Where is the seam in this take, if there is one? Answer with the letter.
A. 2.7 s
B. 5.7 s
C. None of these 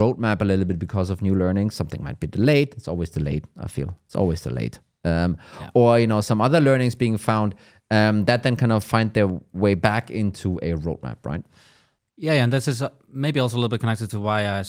C